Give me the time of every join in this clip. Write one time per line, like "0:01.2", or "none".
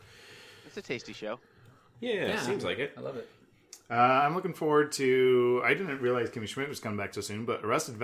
none